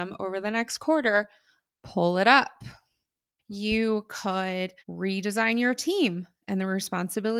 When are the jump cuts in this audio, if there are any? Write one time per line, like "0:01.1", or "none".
0:03.4
0:04.8